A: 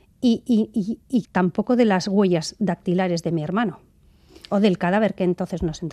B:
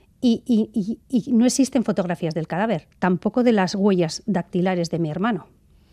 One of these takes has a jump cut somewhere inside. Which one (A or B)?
A